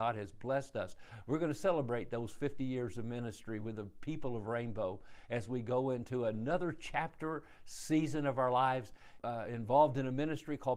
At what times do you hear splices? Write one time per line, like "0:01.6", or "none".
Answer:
0:09.2